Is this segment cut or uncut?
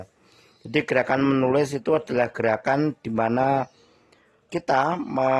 cut